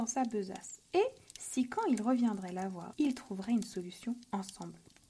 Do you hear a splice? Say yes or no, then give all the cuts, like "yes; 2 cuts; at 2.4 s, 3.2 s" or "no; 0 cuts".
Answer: yes; 1 cut; at 2.9 s